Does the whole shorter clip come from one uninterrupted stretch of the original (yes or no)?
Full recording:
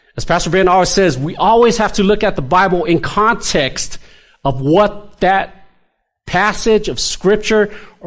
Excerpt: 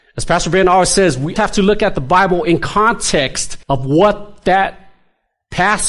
no